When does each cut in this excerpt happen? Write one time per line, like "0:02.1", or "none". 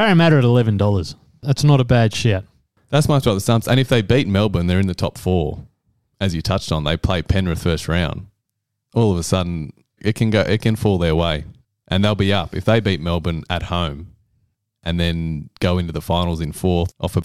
0:10.0